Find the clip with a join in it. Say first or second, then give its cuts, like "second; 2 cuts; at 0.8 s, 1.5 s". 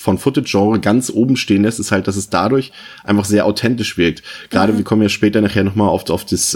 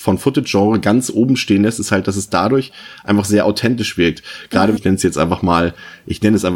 second; 1 cut; at 4.8 s